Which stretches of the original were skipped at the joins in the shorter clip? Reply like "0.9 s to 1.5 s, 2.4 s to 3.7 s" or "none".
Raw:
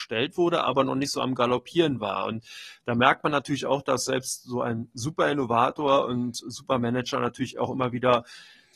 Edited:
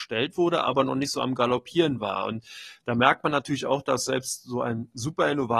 none